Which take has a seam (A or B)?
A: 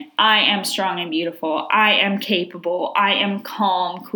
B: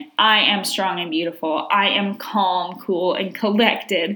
B